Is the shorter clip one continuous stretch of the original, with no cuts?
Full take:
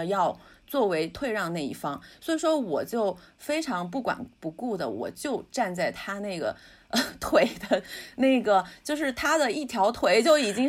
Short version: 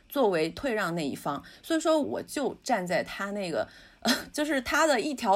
no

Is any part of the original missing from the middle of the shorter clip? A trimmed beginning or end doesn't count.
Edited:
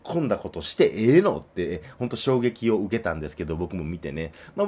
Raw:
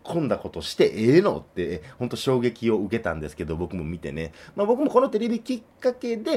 no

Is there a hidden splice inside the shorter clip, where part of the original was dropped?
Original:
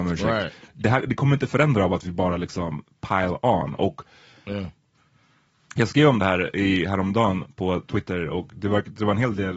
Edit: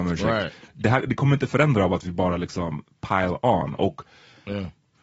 no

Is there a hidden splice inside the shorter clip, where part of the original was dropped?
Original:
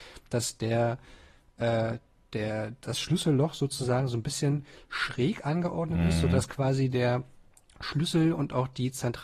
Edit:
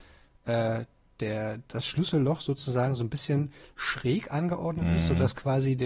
no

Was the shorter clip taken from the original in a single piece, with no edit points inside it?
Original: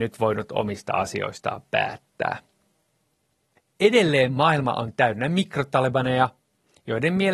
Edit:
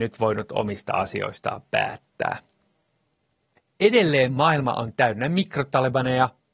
yes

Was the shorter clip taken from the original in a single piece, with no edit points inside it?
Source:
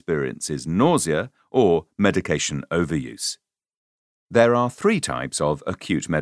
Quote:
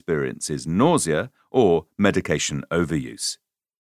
yes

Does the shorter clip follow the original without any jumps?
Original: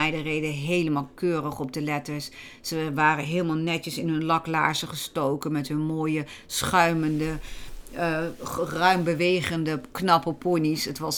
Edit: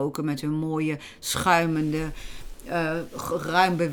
yes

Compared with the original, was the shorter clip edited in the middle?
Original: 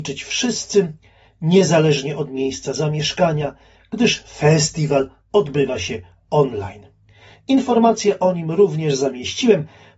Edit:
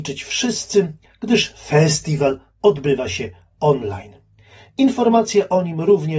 yes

